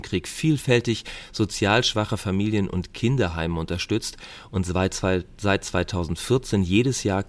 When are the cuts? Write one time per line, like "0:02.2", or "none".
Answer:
none